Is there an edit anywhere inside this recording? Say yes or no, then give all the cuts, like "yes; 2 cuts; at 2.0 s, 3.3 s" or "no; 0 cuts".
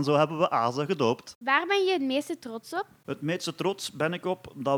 no; 0 cuts